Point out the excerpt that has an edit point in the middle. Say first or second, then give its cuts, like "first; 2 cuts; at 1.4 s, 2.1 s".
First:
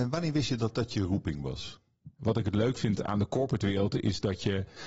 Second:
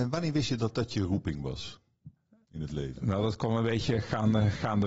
first; 1 cut; at 2.2 s